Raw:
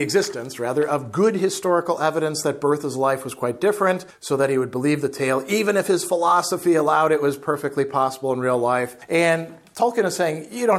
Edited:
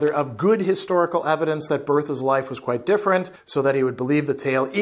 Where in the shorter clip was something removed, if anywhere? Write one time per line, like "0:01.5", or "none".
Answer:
none